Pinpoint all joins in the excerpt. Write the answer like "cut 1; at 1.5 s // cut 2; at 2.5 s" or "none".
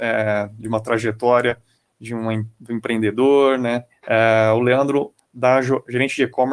cut 1; at 3.9 s // cut 2; at 5.2 s